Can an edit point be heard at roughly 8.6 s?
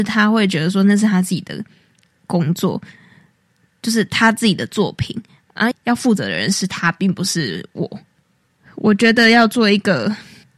no; 1 cut; at 5.7 s

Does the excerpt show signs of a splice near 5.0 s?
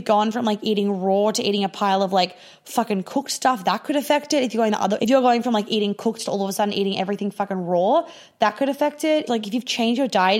yes; 2 cuts; at 5.0 s, 9.3 s

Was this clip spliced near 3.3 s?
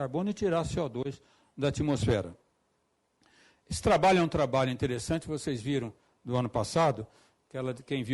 no; 0 cuts

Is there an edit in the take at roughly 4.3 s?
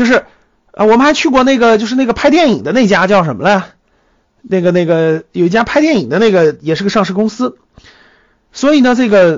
no; 0 cuts

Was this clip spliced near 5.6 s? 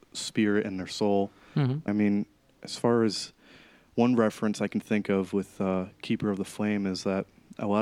no; 1 cut; at 1.9 s

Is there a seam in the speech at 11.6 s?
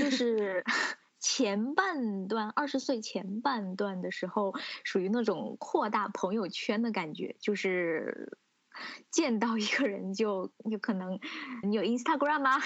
yes; 1 cut; at 11.6 s

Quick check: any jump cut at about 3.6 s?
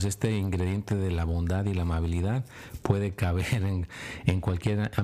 no; 0 cuts

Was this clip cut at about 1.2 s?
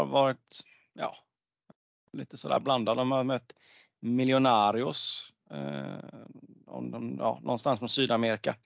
no; 0 cuts

